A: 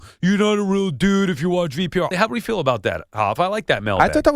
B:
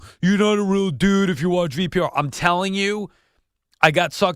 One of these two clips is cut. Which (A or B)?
A